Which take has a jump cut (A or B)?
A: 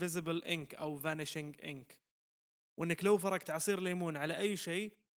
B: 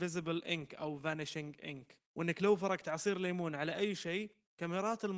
B